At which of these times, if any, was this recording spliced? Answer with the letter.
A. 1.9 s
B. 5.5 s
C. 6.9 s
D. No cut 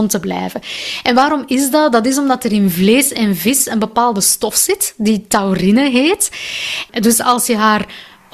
C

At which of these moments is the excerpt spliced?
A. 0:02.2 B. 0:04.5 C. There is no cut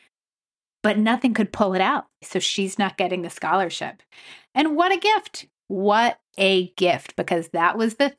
A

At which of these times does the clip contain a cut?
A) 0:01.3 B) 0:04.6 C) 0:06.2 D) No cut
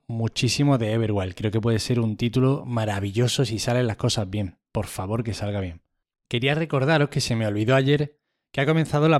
C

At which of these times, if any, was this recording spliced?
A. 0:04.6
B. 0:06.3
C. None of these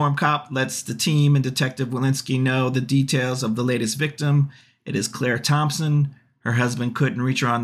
C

